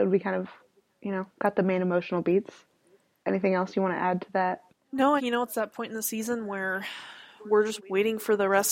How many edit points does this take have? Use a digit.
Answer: 2